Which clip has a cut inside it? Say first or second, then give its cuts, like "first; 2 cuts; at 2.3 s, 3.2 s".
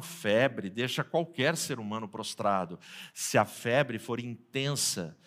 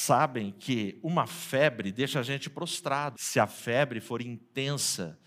second; 1 cut; at 3.1 s